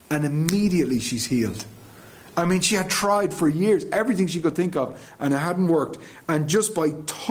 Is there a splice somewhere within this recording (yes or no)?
no